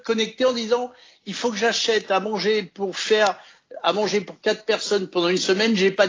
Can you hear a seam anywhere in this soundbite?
no; 0 cuts

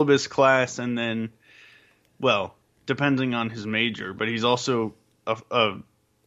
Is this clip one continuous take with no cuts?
yes; 0 cuts

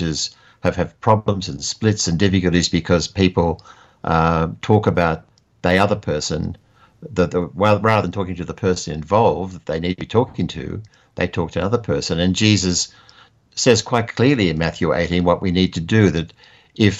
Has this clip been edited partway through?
no; 0 cuts

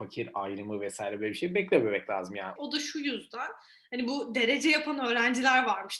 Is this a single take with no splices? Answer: no; 1 cut; at 2.6 s

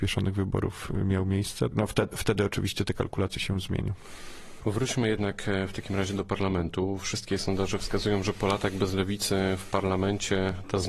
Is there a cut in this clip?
yes; 2 cuts; at 1.7 s, 3.3 s

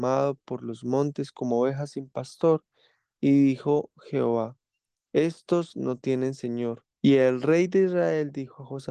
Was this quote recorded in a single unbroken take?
no; 1 cut; at 6.9 s

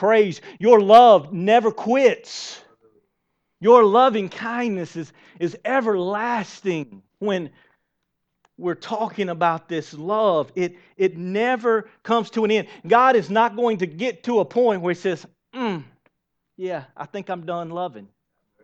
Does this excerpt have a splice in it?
yes; 1 cut; at 7.1 s

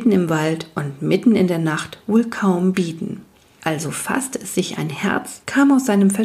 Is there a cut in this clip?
no; 0 cuts

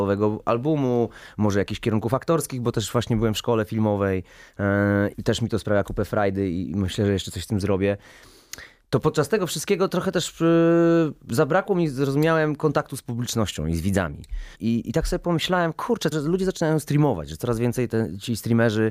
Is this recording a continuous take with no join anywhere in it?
no; 3 cuts; at 5.1 s, 14.5 s, 16.1 s

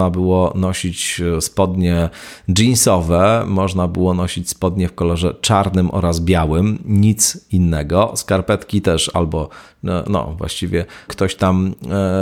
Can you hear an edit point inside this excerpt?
yes; 1 cut; at 11.1 s

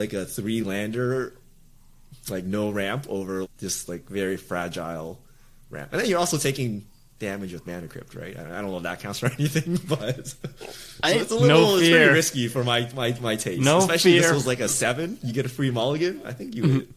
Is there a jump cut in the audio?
yes; 1 cut; at 3.4 s

